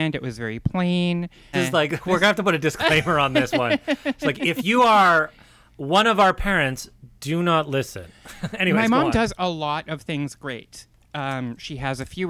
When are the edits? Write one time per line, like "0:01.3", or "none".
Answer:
0:01.5